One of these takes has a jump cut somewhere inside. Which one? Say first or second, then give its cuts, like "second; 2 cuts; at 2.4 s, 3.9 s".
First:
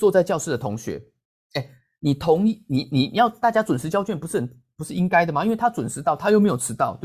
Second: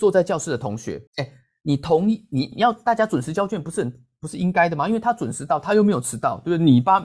second; 2 cuts; at 1.1 s, 2.5 s